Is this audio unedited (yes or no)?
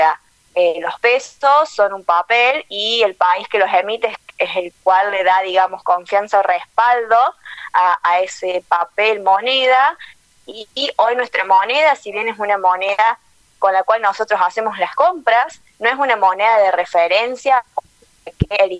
yes